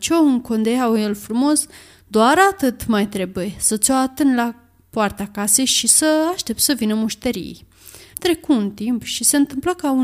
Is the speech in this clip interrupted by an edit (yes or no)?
yes